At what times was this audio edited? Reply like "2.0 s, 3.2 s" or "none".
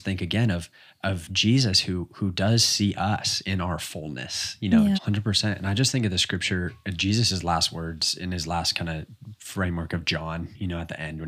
4.9 s